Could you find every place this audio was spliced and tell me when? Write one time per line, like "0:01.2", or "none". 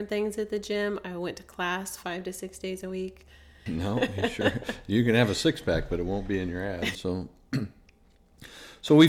0:03.7
0:06.9